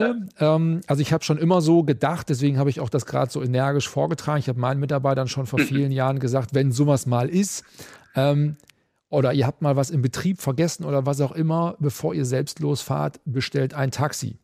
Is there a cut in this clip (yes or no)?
no